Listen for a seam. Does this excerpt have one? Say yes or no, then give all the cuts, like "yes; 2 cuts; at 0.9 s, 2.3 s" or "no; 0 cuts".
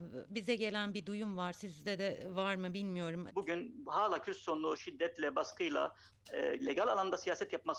yes; 2 cuts; at 3.3 s, 6.6 s